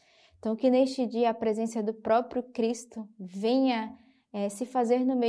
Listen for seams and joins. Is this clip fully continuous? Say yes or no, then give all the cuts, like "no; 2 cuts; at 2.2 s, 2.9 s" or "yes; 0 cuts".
yes; 0 cuts